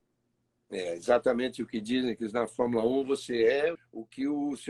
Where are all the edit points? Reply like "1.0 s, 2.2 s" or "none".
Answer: 3.7 s